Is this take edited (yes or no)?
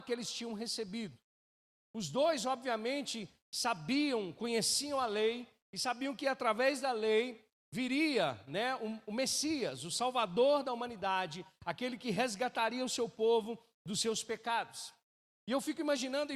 no